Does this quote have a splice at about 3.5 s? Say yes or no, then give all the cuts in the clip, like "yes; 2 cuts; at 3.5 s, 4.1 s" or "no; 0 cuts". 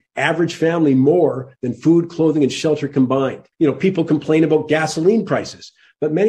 yes; 1 cut; at 3.5 s